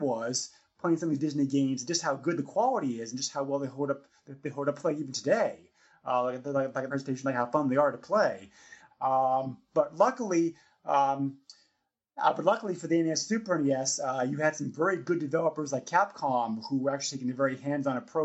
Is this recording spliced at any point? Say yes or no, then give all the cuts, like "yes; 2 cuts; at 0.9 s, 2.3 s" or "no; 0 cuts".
yes; 2 cuts; at 6.9 s, 8.9 s